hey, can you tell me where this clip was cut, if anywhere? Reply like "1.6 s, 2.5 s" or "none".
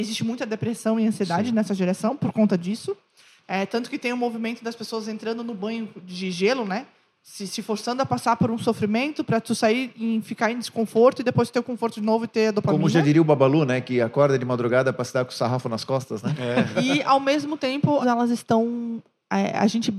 16.7 s, 18.0 s